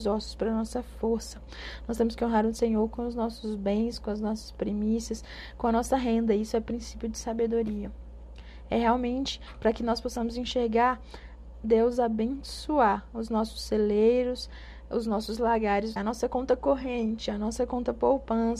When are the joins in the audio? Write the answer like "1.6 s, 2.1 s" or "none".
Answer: 16.0 s